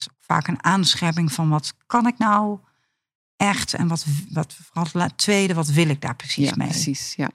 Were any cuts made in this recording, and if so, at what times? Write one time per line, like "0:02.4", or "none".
none